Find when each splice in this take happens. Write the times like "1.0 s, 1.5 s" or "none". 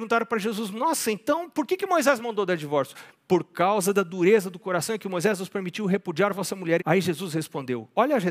6.8 s